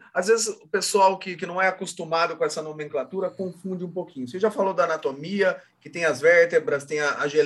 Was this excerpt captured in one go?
yes; 0 cuts

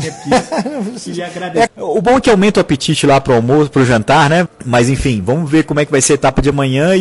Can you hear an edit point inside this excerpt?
yes; 2 cuts; at 1.7 s, 4.5 s

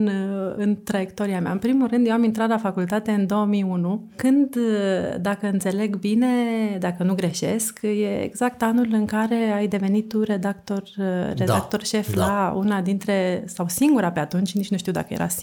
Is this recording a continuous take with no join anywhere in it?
yes; 0 cuts

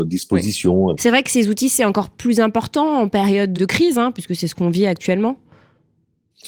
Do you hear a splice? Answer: yes; 2 cuts; at 0.9 s, 3.5 s

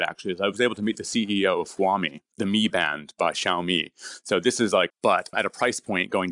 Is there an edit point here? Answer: yes; 2 cuts; at 2.3 s, 4.9 s

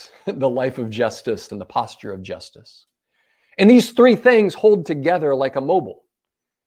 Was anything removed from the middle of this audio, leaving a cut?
yes; 1 cut; at 1.5 s

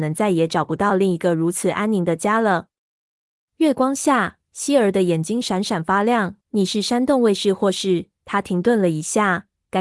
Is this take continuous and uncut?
no; 1 cut; at 6.4 s

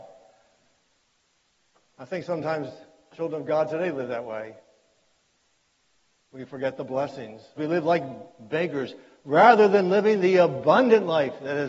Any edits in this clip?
yes; 1 cut; at 7.6 s

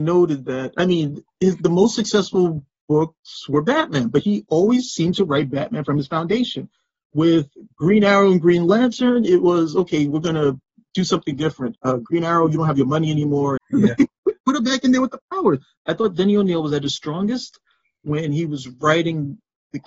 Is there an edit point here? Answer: yes; 2 cuts; at 13.6 s, 15.8 s

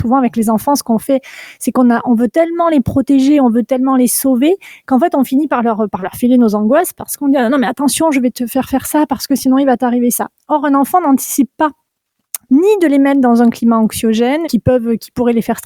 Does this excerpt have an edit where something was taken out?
yes; 2 cuts; at 12.4 s, 14.4 s

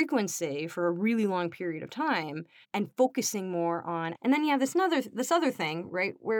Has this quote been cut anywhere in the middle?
yes; 2 cuts; at 2.6 s, 4.1 s

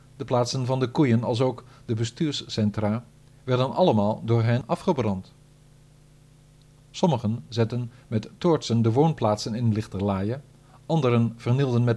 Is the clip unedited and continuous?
yes; 0 cuts

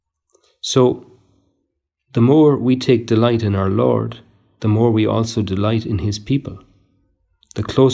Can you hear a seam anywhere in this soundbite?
no; 0 cuts

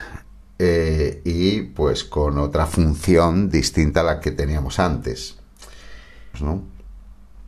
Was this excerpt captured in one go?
no; 1 cut; at 6.3 s

